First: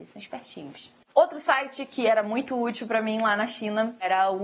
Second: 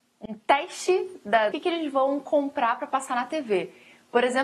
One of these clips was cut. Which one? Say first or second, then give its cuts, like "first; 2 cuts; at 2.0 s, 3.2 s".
second; 1 cut; at 1.5 s